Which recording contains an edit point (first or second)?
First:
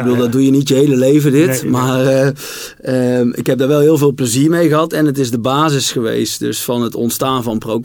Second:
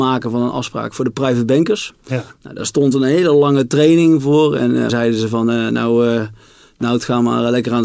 second